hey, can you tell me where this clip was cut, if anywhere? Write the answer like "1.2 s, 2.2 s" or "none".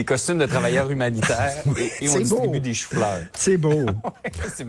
2.0 s